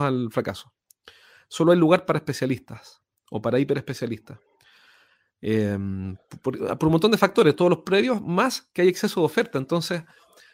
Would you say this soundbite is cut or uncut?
uncut